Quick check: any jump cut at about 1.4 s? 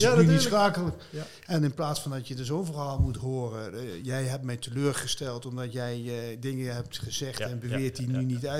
no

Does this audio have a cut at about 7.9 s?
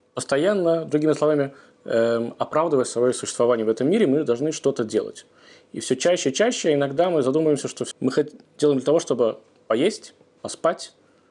yes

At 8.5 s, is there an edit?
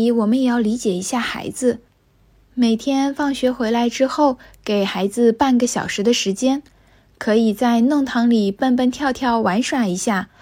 no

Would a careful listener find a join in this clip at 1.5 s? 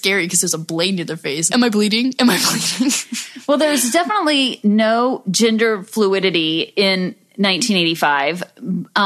yes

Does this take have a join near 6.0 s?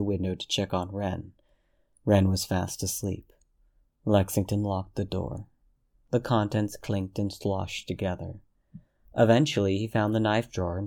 yes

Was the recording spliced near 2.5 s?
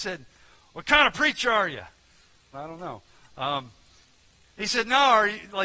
yes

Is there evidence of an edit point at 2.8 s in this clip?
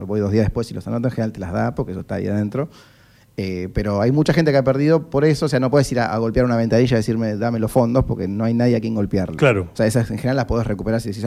no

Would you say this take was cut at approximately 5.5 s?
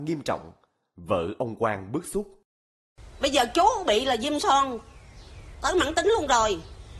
yes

